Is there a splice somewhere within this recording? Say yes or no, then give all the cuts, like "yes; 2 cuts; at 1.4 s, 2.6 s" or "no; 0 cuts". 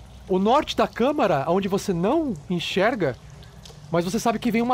no; 0 cuts